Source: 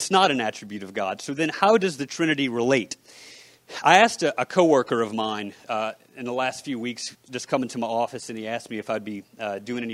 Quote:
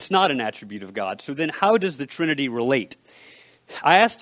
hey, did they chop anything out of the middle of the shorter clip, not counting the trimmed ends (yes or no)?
no